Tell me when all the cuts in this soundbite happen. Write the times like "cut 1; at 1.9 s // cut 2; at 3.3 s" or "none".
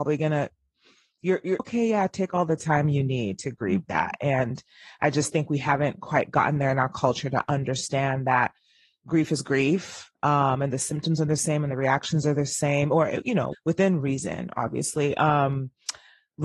cut 1; at 1.6 s // cut 2; at 13.5 s